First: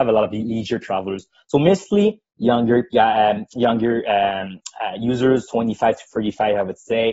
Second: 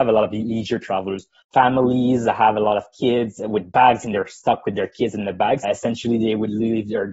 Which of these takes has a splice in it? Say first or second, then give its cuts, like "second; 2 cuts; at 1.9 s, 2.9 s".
second; 2 cuts; at 1.4 s, 5.6 s